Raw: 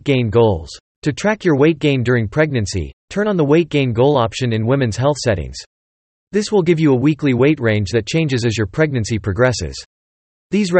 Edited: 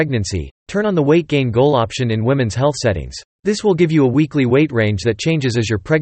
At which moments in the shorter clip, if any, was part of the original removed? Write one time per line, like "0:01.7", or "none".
0:03.3

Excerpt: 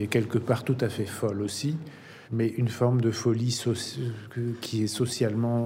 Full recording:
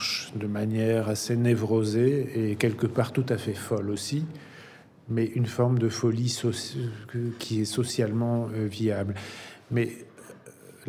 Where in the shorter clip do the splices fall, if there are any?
0:02.2

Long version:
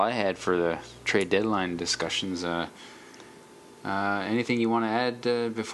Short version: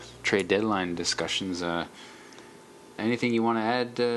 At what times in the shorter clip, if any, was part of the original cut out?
0:03.0

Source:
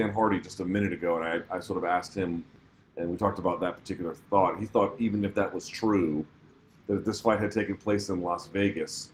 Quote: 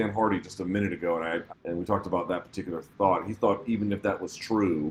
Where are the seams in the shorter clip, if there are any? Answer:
0:01.5

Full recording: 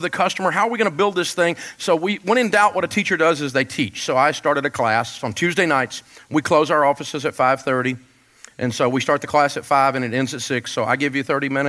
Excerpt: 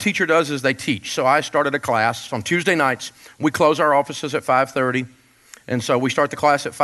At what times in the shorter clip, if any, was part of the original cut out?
none

